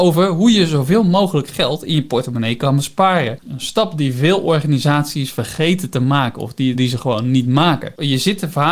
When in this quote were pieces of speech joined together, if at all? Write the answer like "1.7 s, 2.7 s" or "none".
3.4 s, 6.7 s